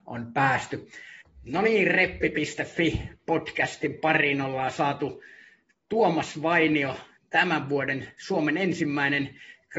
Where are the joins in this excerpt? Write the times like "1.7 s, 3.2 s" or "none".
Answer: 1.2 s